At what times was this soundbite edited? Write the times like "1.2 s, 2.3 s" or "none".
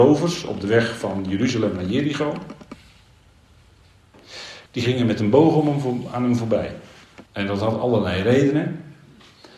4.7 s, 7.3 s